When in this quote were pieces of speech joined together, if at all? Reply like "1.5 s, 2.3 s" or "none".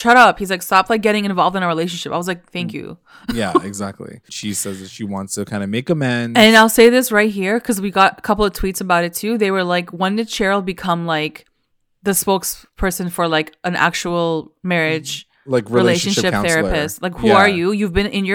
4.3 s